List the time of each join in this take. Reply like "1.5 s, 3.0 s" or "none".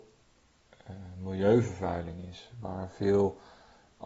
none